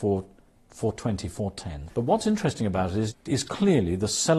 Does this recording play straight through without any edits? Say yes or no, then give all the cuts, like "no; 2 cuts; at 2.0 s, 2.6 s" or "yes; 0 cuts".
no; 1 cut; at 1.9 s